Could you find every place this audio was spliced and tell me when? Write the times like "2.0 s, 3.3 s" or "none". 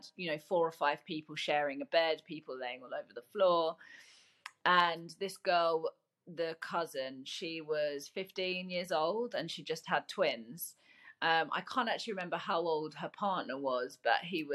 none